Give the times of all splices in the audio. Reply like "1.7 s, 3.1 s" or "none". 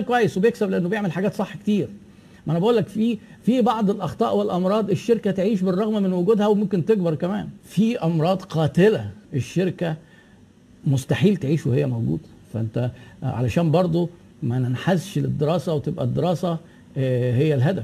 9.2 s